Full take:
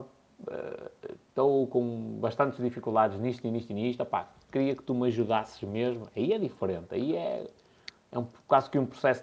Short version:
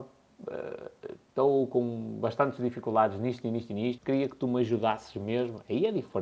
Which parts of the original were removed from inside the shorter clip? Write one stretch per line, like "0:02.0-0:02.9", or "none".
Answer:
0:04.0-0:04.4